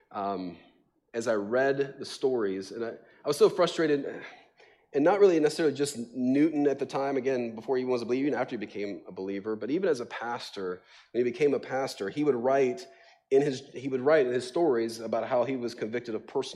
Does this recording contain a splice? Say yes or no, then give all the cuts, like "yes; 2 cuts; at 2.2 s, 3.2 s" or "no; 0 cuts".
no; 0 cuts